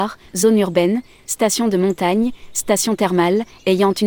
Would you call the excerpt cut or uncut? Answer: uncut